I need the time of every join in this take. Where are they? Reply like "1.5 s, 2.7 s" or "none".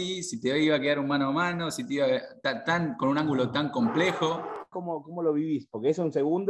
4.7 s